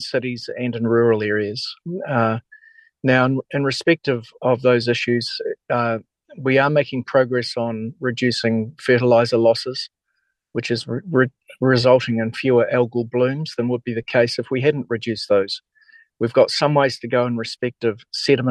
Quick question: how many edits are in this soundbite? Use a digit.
0